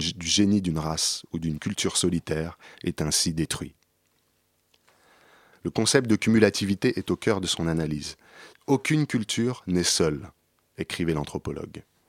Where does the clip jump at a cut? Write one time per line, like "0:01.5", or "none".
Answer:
0:05.5
0:08.5